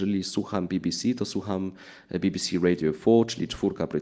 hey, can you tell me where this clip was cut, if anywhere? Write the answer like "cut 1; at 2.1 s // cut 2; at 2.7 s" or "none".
none